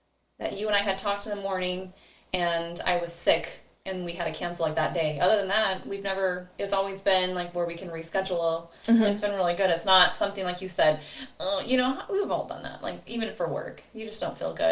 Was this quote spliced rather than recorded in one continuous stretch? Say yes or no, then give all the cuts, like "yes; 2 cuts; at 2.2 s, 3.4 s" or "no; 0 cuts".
no; 0 cuts